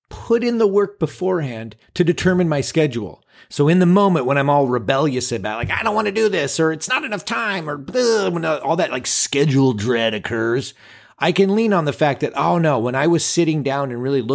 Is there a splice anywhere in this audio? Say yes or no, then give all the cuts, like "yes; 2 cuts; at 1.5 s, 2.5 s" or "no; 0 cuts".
no; 0 cuts